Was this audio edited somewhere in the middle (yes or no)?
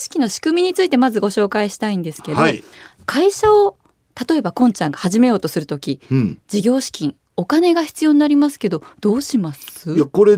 no